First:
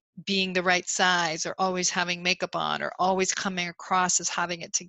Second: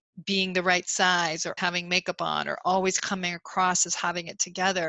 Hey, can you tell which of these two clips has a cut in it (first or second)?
second